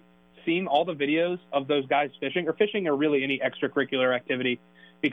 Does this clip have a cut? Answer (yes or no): no